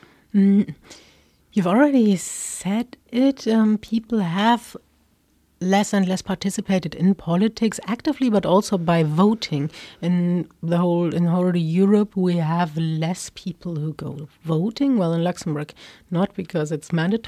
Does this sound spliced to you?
no; 0 cuts

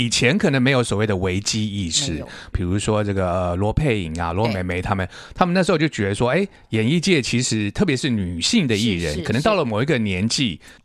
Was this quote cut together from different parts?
yes; 1 cut; at 2.5 s

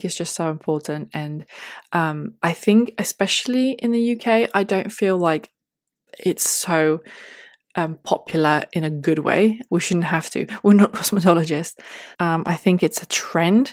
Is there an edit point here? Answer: yes; 2 cuts; at 9.7 s, 12.1 s

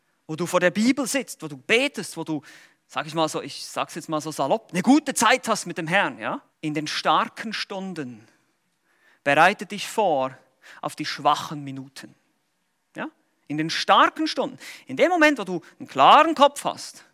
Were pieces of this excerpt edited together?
yes; 1 cut; at 6.5 s

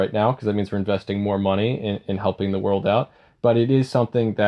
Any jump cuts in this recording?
no; 0 cuts

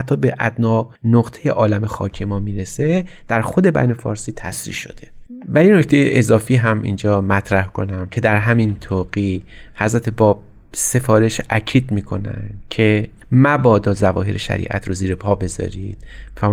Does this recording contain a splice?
yes; 1 cut; at 1.0 s

